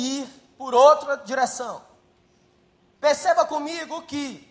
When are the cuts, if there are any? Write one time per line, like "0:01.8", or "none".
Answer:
0:03.0